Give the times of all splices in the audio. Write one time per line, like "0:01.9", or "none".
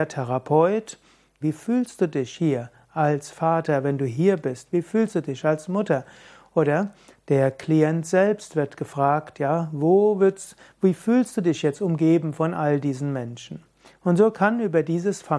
0:01.4